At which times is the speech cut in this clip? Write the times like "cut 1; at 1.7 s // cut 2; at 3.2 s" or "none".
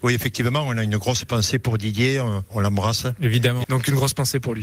cut 1; at 3.6 s